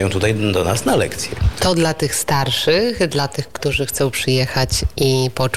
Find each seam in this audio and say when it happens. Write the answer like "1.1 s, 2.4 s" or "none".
1.6 s